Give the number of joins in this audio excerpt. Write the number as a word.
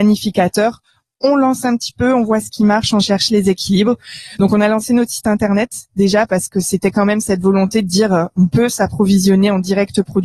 zero